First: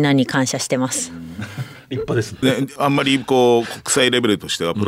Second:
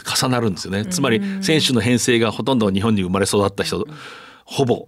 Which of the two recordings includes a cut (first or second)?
first